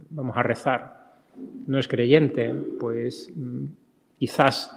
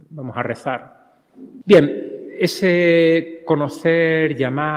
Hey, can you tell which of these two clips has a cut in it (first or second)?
second